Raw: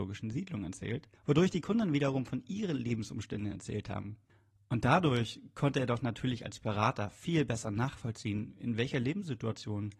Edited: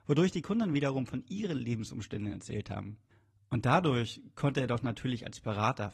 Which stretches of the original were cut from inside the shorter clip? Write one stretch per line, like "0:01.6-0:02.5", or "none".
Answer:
none

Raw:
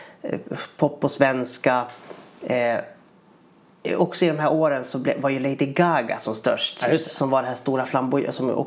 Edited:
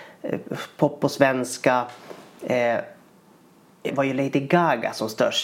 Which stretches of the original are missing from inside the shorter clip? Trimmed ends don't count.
0:03.9-0:05.1

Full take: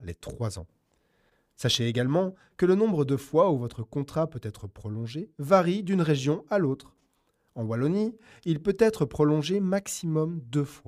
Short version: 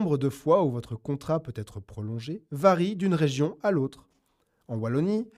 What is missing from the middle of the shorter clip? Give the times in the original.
none

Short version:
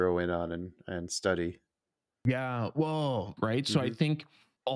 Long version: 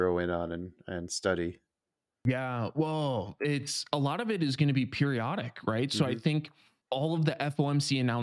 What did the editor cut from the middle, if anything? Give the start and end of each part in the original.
0:03.4-0:05.6

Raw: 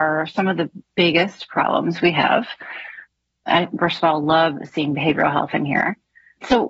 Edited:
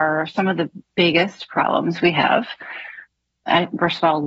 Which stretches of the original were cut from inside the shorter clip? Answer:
none

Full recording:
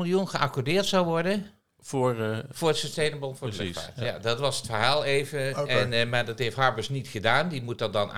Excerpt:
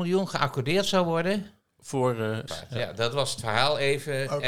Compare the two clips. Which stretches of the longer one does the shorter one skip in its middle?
0:02.5-0:03.7

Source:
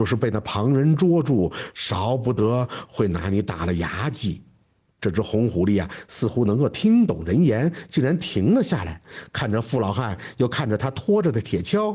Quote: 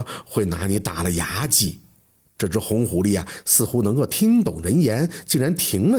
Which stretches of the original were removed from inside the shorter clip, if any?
none

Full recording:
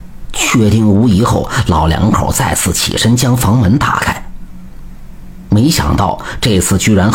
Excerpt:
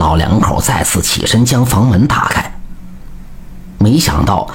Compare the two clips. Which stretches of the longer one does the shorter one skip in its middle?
none

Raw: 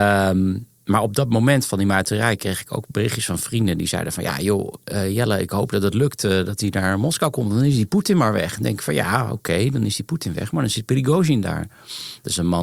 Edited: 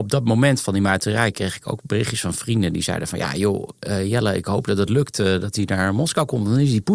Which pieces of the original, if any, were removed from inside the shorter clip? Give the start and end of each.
none

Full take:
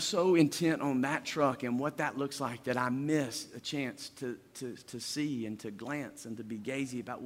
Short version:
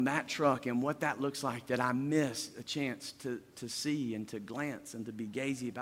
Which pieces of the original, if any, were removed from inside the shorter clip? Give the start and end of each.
0:04.5-0:04.8

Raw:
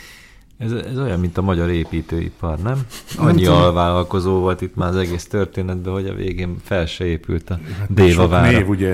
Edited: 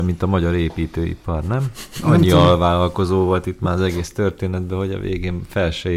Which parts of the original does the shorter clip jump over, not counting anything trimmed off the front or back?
none

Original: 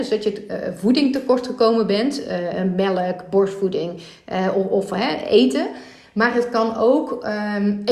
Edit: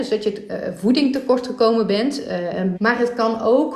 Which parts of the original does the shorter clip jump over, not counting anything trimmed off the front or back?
0:02.7-0:06.1

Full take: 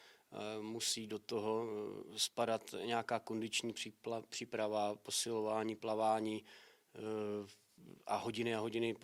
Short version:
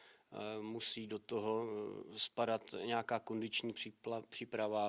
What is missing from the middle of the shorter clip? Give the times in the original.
none

